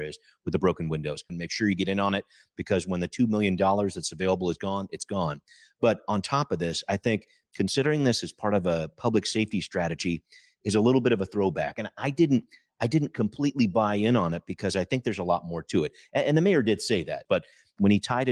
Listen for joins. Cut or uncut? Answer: cut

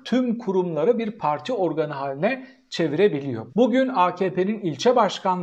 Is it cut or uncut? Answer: cut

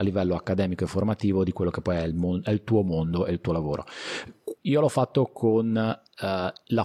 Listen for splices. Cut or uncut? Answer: cut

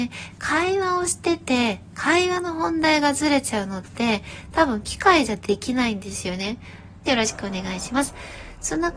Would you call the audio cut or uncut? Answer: cut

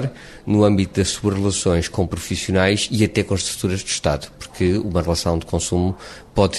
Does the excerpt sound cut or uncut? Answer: uncut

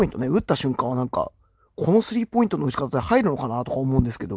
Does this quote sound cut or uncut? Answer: uncut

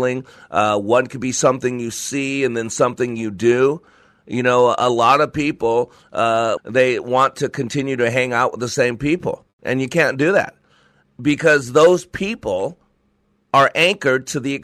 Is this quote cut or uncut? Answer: cut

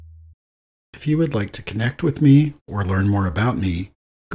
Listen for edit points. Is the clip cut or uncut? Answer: uncut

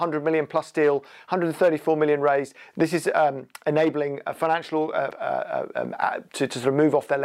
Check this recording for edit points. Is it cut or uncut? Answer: cut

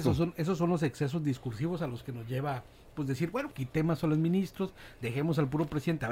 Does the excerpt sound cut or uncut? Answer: cut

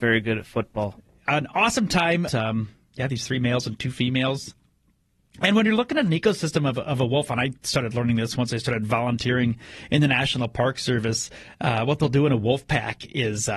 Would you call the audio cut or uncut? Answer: cut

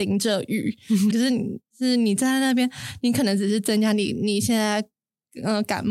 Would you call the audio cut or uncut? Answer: cut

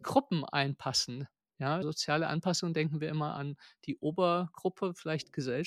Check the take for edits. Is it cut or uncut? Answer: cut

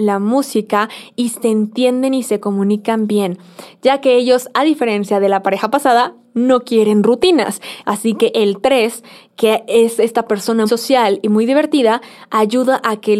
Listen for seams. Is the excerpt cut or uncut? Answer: cut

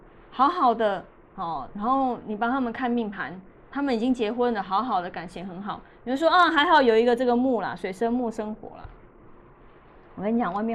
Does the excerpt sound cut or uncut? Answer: uncut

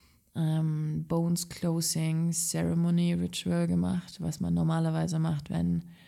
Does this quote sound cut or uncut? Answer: uncut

